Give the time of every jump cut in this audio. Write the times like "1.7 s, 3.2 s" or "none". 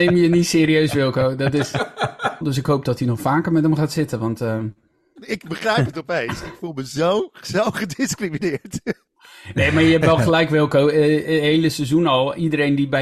2.4 s, 5.2 s